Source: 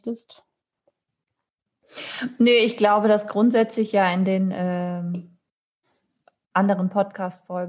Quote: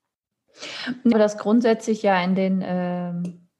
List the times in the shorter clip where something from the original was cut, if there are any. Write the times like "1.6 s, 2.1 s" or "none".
1.1 s